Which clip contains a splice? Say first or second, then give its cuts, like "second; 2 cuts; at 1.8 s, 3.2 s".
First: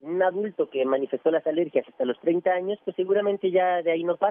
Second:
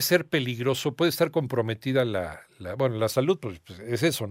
second; 1 cut; at 0.9 s